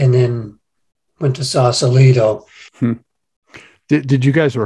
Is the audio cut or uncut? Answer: cut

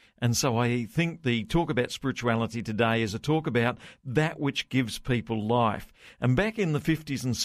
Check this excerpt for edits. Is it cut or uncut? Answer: uncut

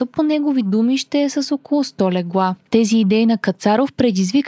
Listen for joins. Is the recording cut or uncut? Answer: cut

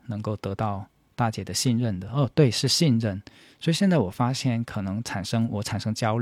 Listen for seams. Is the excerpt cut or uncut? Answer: uncut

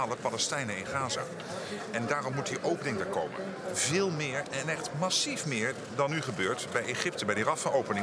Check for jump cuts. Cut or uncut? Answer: uncut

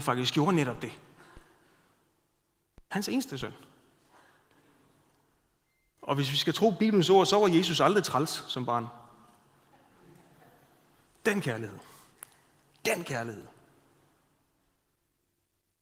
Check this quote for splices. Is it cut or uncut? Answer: uncut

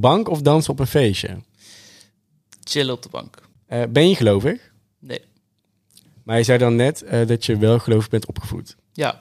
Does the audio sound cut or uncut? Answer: uncut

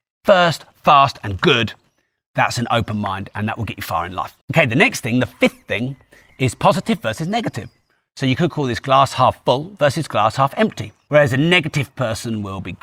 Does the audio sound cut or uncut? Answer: cut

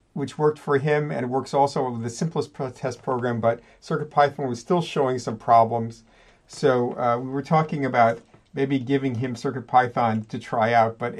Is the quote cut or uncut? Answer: uncut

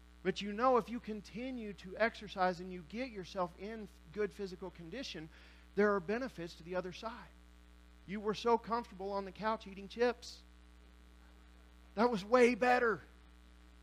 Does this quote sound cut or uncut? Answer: cut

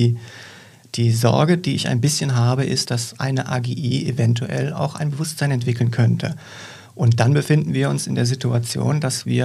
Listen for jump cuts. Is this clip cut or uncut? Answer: cut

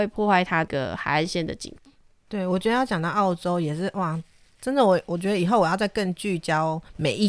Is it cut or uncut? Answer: uncut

